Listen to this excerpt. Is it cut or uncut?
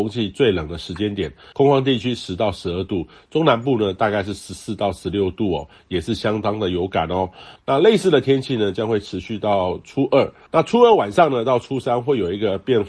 cut